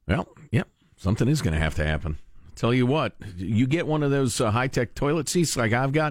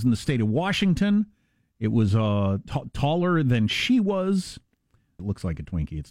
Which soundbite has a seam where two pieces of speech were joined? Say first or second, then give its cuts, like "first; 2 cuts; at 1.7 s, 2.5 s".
second; 1 cut; at 5.2 s